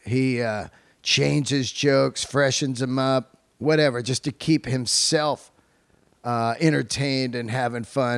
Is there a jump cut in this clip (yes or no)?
no